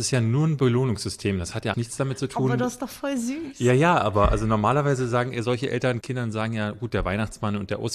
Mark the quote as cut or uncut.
cut